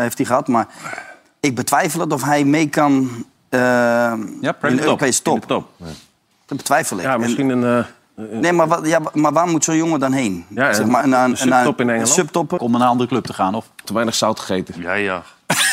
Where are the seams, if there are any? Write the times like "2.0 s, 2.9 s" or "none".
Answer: 11.0 s, 12.6 s, 13.8 s